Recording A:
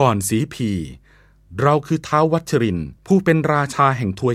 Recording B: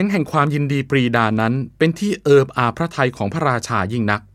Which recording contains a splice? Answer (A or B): A